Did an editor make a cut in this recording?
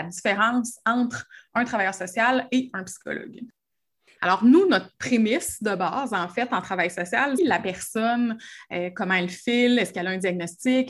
yes; 2 cuts; at 4.2 s, 7.4 s

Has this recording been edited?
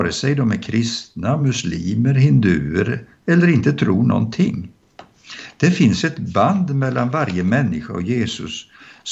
no; 0 cuts

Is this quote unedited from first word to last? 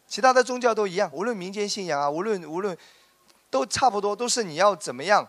yes; 0 cuts

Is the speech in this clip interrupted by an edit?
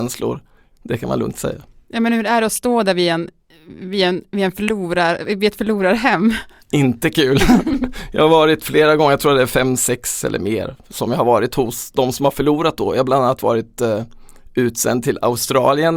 no; 0 cuts

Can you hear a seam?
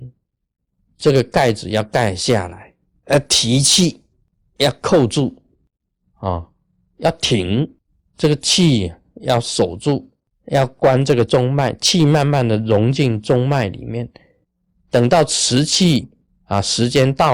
no; 0 cuts

